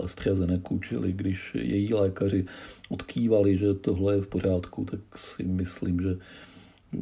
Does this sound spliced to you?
no; 0 cuts

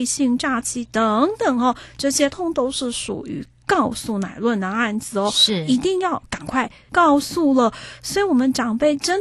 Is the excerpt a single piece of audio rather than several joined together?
no; 2 cuts; at 2.3 s, 6.9 s

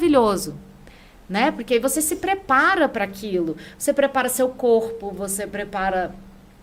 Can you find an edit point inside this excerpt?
no; 0 cuts

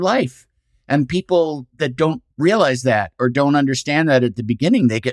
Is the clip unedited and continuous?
no; 1 cut; at 2.3 s

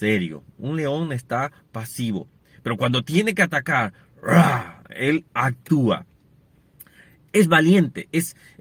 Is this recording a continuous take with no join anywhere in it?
yes; 0 cuts

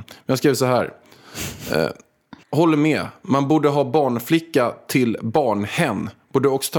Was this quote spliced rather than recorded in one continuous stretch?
yes; 1 cut; at 2.4 s

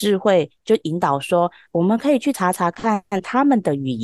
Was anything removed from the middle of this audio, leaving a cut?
no; 0 cuts

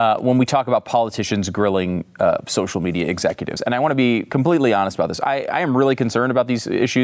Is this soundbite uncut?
yes; 0 cuts

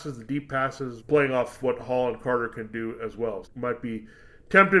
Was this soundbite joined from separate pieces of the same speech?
yes; 2 cuts; at 1.0 s, 3.4 s

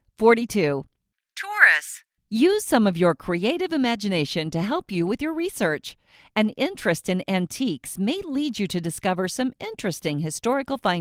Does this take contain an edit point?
no; 0 cuts

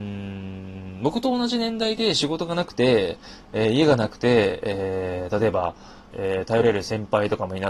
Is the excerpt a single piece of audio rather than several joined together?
no; 1 cut; at 6.1 s

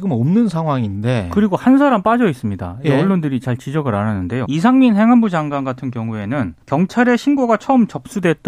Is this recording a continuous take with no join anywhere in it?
no; 2 cuts; at 4.5 s, 6.6 s

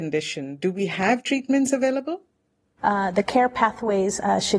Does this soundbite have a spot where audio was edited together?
yes; 1 cut; at 2.8 s

